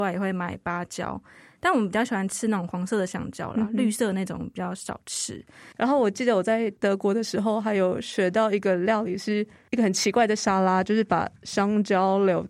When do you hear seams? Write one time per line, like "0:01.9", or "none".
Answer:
0:05.7